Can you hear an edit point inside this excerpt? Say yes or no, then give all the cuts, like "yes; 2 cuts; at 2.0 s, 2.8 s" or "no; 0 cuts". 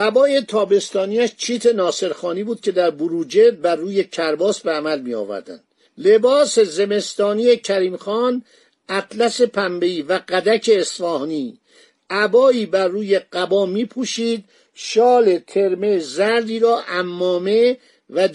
no; 0 cuts